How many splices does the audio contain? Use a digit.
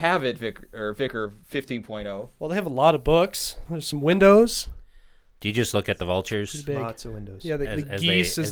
1